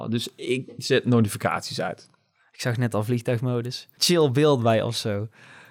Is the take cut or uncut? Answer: cut